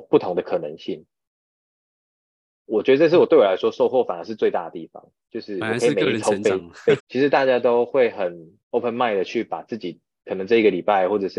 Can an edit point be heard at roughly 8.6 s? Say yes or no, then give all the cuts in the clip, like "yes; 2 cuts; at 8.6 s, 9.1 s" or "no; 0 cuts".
yes; 2 cuts; at 7.0 s, 8.6 s